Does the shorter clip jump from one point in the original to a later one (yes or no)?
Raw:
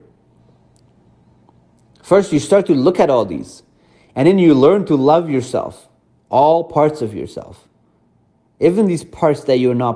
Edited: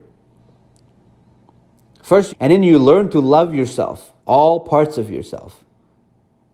yes